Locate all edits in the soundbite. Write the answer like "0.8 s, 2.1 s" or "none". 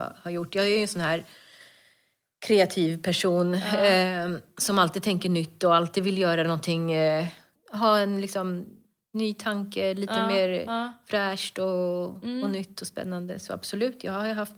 none